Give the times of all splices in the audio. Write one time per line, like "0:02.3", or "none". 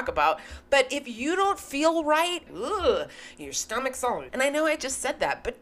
0:02.5
0:04.3